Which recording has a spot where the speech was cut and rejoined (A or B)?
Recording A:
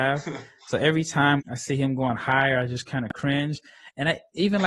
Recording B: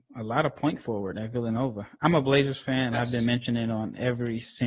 A